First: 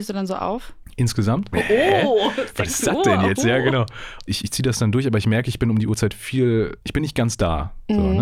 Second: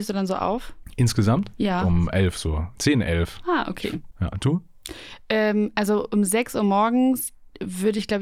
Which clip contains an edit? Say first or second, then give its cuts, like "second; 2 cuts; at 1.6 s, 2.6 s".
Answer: first; 1 cut; at 1.5 s